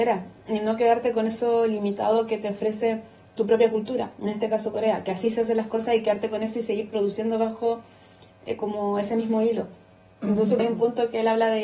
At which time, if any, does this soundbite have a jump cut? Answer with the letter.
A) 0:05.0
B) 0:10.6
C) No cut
B